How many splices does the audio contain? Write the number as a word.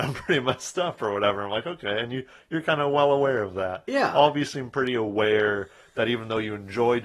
zero